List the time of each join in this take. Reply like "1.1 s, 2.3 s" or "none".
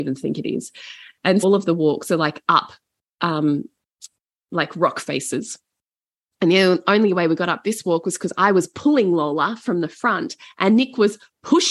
1.4 s

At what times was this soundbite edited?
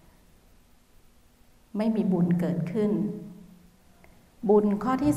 none

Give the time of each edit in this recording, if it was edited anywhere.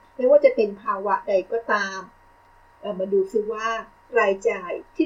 none

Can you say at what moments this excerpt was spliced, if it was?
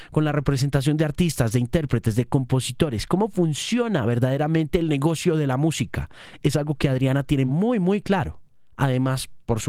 none

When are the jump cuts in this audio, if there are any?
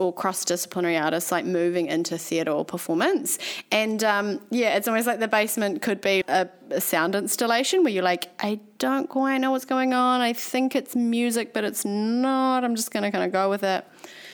6.2 s

